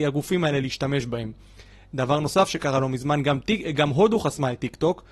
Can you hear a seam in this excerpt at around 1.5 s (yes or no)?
no